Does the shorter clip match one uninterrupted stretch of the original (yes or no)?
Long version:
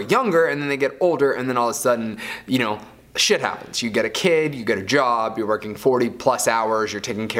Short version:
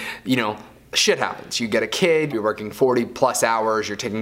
no